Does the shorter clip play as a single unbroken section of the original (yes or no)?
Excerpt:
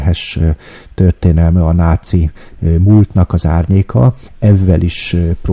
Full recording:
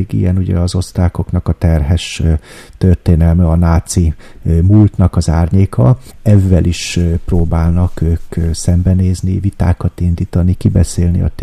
yes